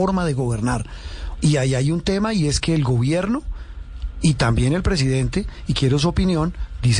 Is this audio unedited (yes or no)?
no